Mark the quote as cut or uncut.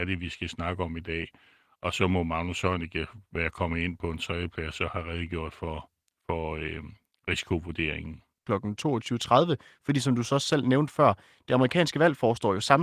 cut